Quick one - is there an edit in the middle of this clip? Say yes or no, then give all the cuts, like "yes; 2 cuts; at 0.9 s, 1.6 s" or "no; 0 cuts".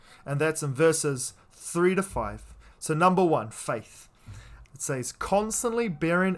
yes; 2 cuts; at 2.7 s, 4.6 s